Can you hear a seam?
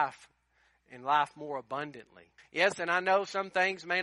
yes; 1 cut; at 2.4 s

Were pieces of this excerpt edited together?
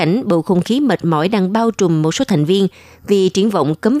no; 0 cuts

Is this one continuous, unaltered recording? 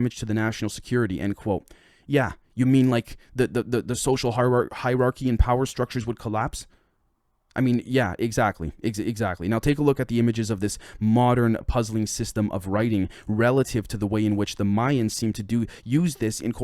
yes; 0 cuts

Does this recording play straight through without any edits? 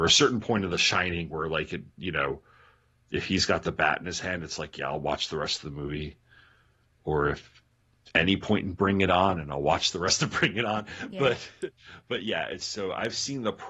yes; 0 cuts

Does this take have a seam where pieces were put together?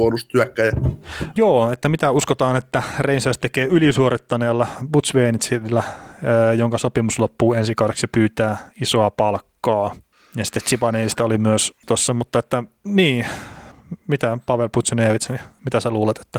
yes; 1 cut; at 1.4 s

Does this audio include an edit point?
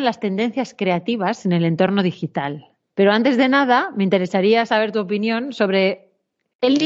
no; 0 cuts

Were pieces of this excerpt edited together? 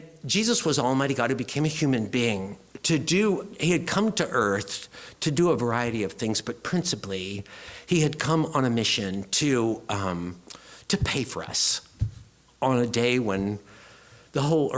no; 0 cuts

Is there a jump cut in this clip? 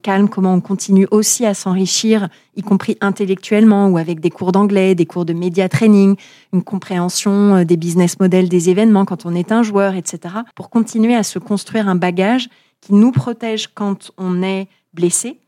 yes; 1 cut; at 10.5 s

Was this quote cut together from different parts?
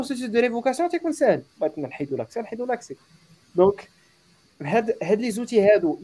no; 0 cuts

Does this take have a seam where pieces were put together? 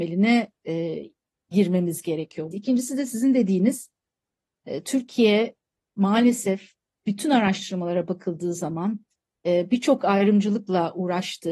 yes; 1 cut; at 2.5 s

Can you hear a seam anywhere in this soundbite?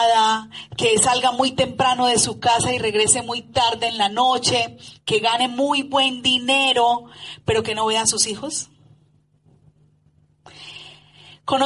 no; 0 cuts

